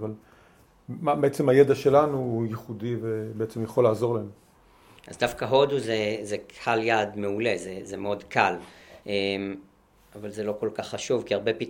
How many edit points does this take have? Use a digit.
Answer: 1